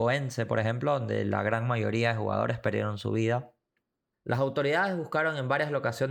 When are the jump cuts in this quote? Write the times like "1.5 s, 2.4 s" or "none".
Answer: 4.1 s